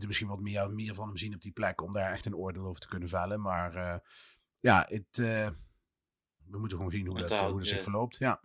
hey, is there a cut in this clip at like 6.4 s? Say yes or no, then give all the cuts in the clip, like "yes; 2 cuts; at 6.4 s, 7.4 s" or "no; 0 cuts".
yes; 1 cut; at 6.4 s